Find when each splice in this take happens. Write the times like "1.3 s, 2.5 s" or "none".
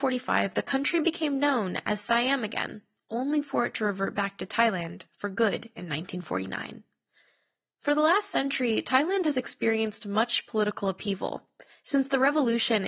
none

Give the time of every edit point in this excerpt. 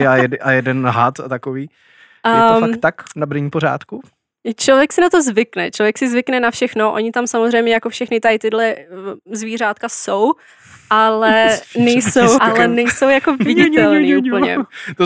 12.4 s

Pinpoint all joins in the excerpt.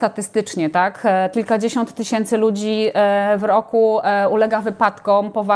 1.3 s

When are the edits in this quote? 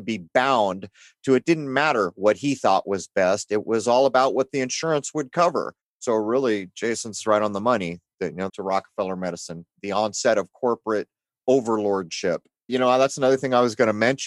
8.5 s, 9.7 s, 12.7 s

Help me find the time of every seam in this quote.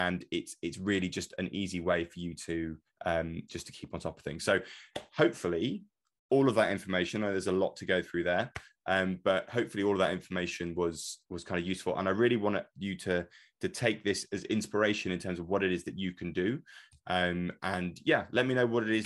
none

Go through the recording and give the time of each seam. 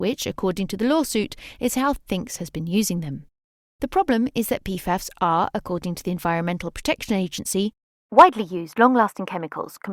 none

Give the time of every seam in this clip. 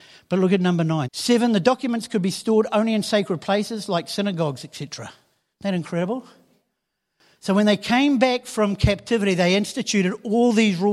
1.0 s, 5.5 s

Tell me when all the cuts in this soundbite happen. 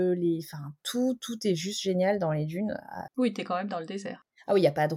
3.1 s

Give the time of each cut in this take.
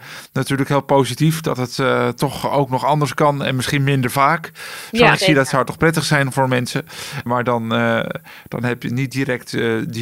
5.1 s, 7.3 s

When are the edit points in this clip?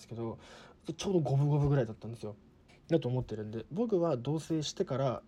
2.7 s

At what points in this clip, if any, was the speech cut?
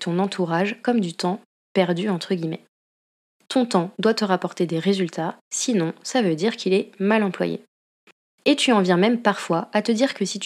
3.5 s

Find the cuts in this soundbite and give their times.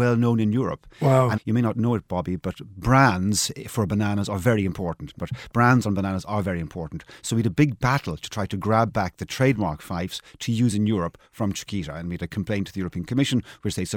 1.4 s, 5.2 s

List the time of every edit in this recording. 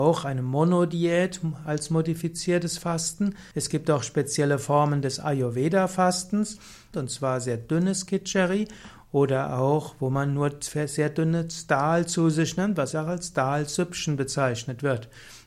3.5 s, 6.9 s, 12.9 s

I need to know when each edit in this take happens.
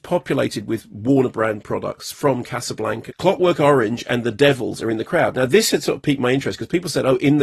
3.1 s

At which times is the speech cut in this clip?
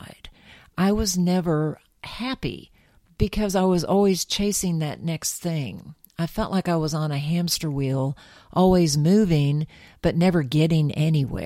none

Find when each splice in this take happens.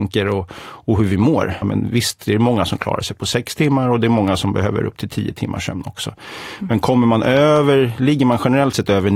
1.6 s

